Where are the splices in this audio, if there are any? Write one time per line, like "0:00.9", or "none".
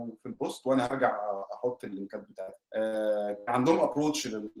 0:02.6